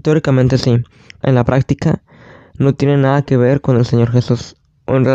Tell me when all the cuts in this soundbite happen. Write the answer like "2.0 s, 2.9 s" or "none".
1.2 s